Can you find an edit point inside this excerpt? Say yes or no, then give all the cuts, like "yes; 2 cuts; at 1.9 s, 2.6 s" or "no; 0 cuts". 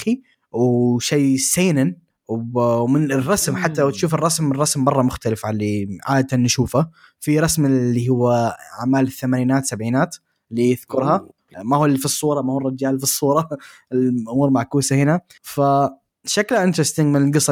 yes; 1 cut; at 11.5 s